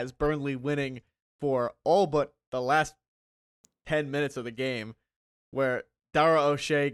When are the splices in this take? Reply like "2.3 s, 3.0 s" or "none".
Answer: none